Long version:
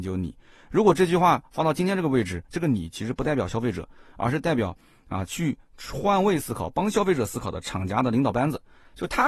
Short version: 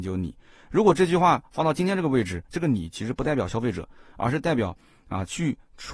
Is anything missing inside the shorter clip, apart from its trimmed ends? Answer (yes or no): no